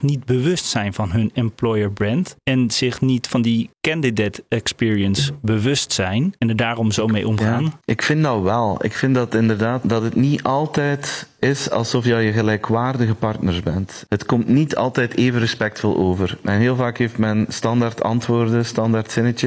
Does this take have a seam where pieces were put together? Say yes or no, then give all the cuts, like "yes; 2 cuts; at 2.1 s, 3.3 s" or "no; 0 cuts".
no; 0 cuts